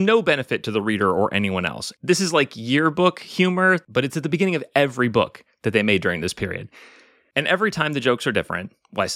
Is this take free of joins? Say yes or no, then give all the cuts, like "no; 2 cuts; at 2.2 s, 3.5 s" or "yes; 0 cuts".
yes; 0 cuts